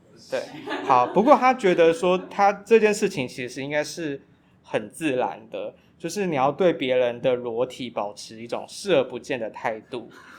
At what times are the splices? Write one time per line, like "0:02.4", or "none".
none